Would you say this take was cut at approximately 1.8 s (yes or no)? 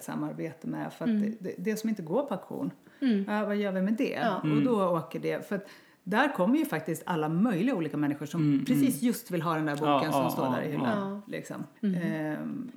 no